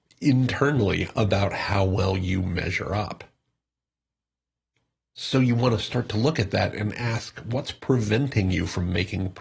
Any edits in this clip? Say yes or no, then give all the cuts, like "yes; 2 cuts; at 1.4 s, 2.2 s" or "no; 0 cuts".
no; 0 cuts